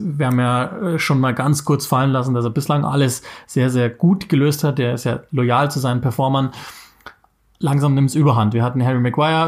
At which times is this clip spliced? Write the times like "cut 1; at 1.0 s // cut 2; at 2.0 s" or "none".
none